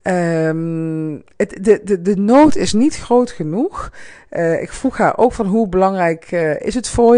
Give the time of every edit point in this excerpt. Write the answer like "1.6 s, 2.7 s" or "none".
none

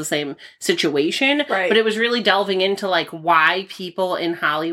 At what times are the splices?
none

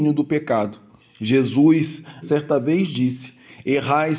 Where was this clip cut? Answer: 1.0 s, 2.2 s

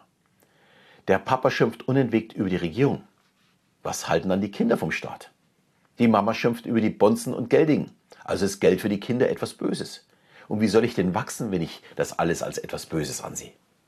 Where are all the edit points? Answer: none

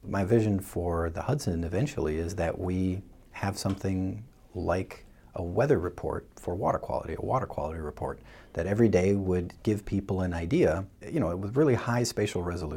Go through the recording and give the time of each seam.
none

